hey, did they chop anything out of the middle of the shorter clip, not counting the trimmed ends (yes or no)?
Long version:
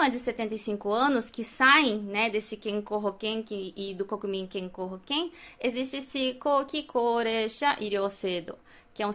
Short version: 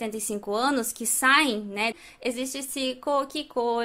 yes